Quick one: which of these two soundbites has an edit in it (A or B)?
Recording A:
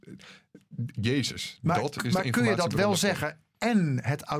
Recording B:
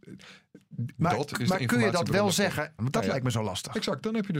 B